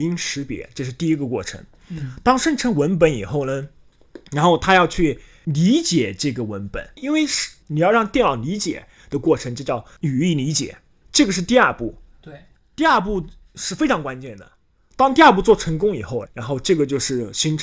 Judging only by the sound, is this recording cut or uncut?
cut